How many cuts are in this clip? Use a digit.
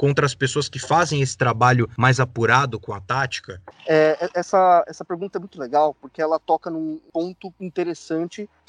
0